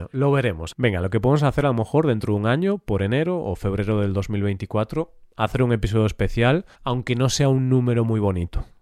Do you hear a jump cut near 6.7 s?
yes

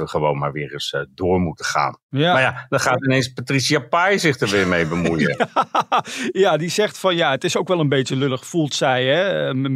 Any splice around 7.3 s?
no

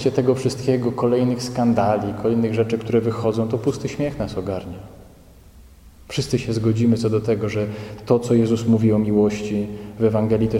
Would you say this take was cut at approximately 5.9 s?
yes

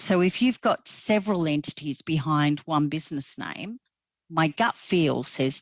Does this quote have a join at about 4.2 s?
no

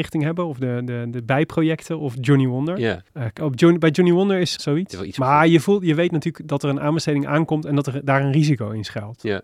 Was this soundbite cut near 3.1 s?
yes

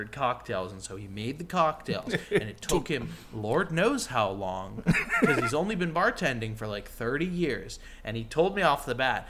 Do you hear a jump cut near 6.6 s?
no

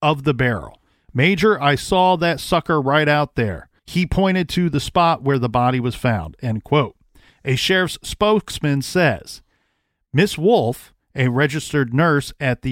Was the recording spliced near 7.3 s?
yes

